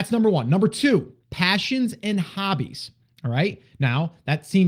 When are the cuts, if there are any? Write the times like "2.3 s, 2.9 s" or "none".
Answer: 1.2 s